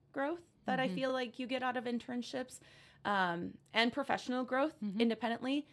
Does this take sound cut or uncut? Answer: uncut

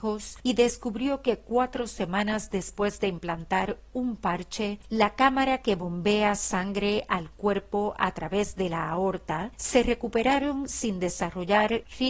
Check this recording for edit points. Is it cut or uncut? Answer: cut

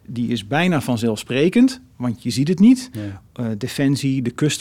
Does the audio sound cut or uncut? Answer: uncut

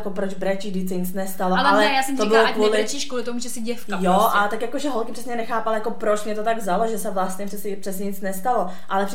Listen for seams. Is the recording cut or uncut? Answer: uncut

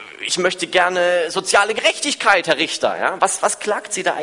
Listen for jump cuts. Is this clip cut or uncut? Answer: uncut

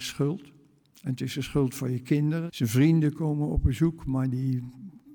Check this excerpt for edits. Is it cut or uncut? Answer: cut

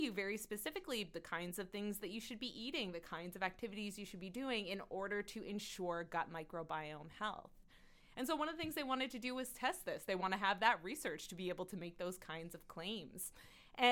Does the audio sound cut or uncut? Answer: uncut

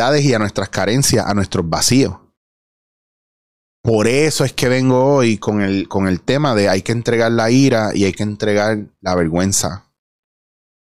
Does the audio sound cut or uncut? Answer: uncut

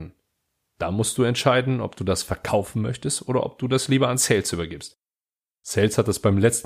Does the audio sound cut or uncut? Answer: uncut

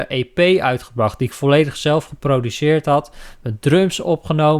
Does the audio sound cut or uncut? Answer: uncut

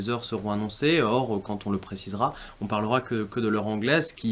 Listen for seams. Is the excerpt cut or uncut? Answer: uncut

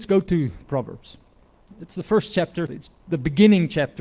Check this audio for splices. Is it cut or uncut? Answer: cut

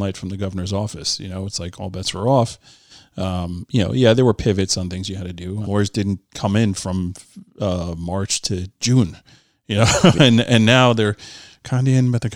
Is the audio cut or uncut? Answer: cut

